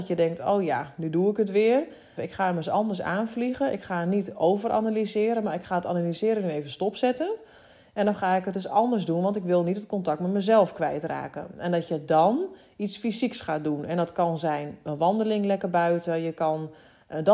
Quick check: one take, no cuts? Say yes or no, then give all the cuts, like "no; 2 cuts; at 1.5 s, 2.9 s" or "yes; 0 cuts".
no; 1 cut; at 2.2 s